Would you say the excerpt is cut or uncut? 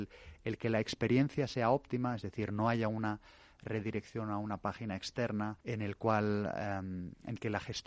cut